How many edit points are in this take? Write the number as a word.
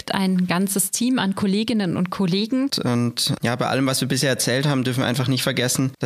one